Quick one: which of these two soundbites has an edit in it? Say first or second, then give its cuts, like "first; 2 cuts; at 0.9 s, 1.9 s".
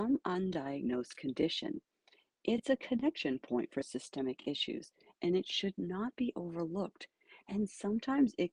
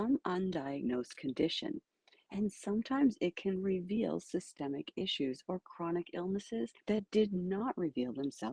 second; 2 cuts; at 2.3 s, 6.8 s